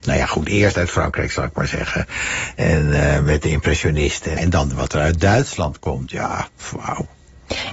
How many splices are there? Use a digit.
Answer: 1